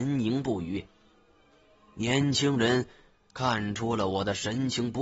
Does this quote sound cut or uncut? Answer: uncut